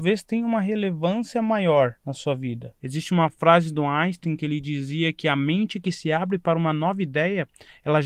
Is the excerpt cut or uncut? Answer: cut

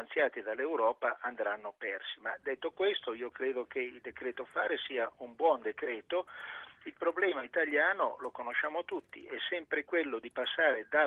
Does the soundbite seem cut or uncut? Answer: uncut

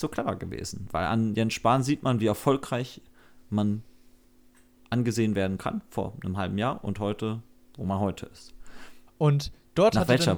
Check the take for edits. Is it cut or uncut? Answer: cut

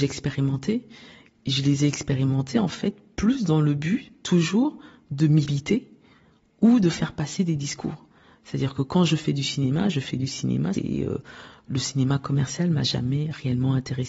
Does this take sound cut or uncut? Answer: cut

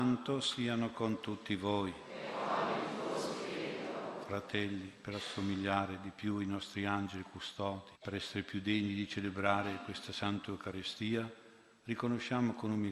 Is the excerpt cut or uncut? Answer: cut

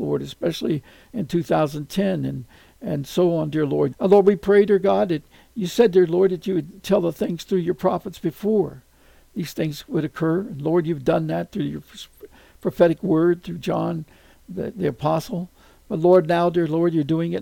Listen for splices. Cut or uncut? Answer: cut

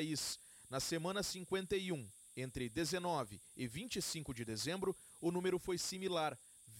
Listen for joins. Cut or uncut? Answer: uncut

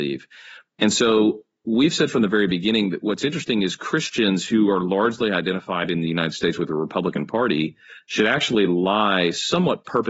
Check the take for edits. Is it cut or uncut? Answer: uncut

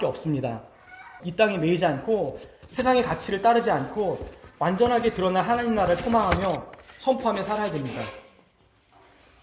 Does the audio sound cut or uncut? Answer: cut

